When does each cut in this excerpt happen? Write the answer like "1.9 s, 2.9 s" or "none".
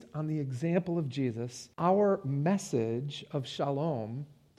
1.7 s

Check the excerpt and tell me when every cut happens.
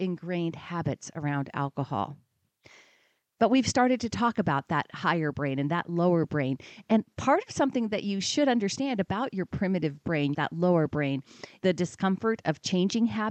10.3 s, 11.6 s

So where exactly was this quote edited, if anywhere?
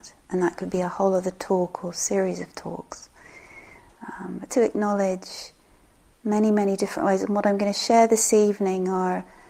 4.5 s

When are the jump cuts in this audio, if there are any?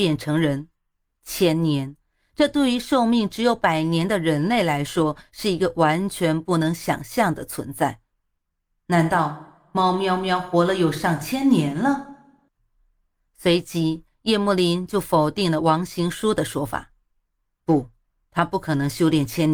none

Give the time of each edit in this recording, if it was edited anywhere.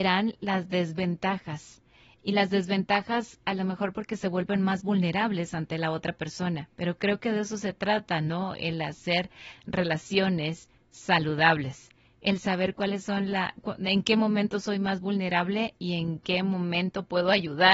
none

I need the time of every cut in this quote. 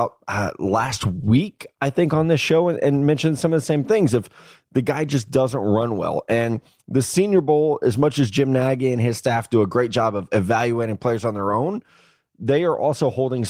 none

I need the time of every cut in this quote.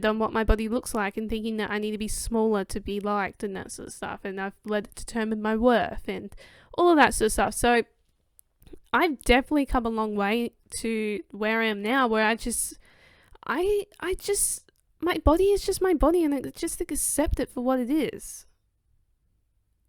none

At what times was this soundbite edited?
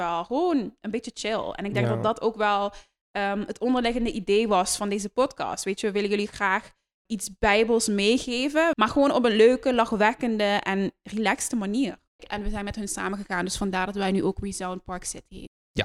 7.1 s, 8.7 s, 12.2 s

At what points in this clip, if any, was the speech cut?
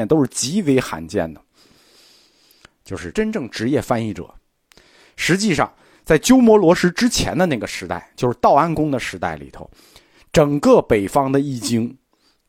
3.1 s

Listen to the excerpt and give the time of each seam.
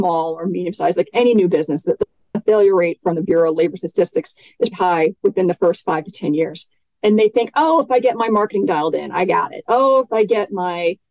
4.7 s

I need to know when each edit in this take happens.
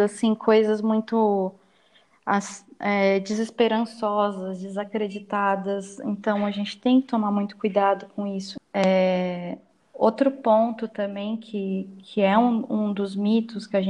8.6 s

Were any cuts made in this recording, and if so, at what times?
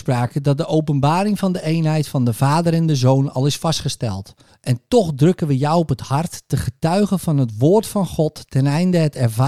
4.5 s

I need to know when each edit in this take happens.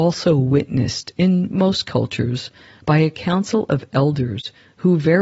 none

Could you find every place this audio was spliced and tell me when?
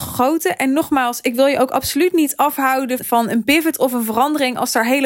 3.0 s

